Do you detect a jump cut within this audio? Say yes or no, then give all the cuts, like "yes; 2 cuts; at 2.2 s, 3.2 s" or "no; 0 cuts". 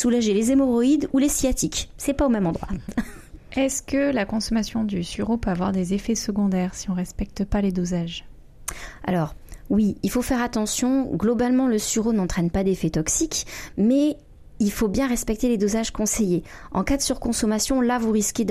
no; 0 cuts